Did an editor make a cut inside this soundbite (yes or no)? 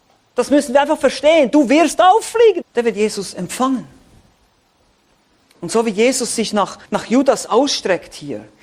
yes